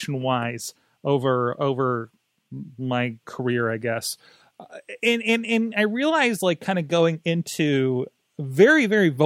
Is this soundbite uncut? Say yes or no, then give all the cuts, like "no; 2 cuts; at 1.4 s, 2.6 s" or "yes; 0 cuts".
yes; 0 cuts